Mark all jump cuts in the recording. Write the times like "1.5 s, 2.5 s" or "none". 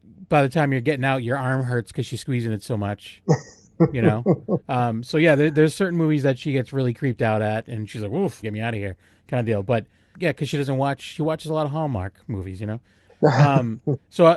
8.4 s, 10.1 s, 13.1 s